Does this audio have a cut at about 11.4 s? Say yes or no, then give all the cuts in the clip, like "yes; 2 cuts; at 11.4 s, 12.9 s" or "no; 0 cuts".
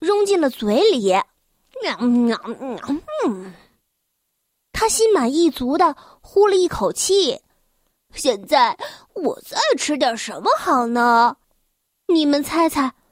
yes; 2 cuts; at 8.1 s, 11.4 s